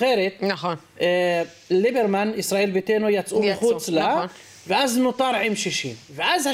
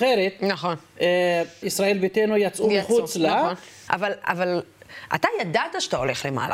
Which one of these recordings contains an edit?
second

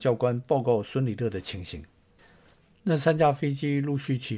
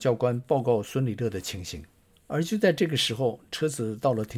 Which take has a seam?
second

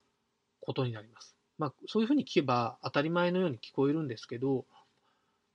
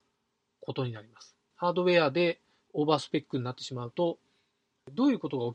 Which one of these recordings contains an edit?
second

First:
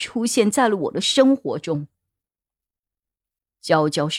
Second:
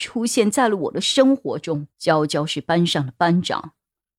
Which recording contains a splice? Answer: second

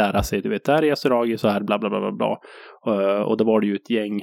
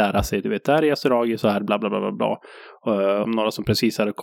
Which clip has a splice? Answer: second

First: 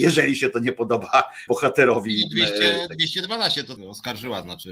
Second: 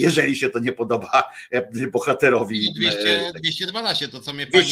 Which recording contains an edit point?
first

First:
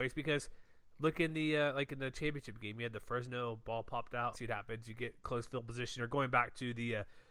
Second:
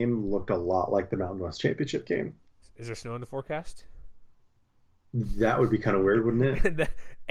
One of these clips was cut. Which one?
first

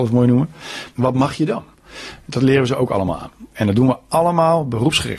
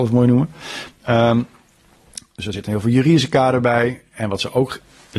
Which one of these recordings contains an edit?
first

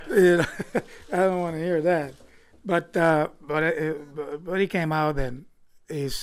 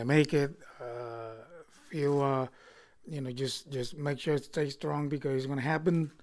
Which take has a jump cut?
second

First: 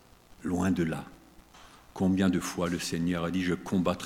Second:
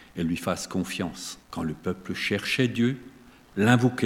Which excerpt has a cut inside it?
second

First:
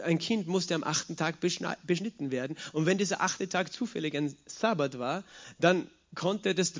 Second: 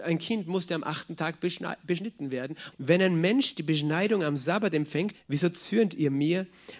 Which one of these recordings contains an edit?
second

